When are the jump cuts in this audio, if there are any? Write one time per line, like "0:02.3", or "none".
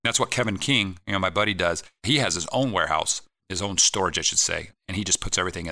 none